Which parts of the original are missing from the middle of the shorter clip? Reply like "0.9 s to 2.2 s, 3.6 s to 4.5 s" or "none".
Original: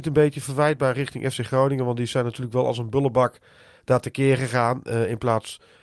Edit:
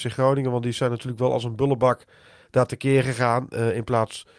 none